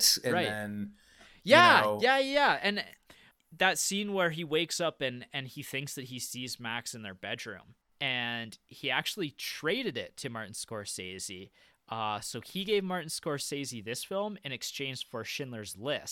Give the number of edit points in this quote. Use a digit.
1